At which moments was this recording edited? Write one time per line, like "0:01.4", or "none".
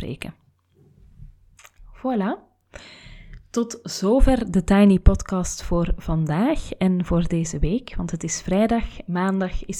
none